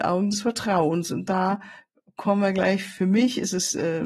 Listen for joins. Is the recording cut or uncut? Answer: uncut